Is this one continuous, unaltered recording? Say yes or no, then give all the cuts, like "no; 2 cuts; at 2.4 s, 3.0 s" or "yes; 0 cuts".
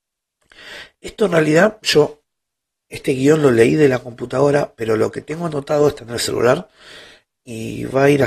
yes; 0 cuts